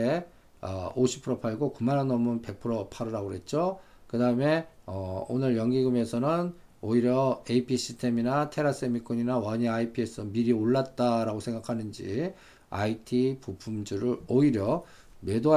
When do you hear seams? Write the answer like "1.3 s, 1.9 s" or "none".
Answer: 3.9 s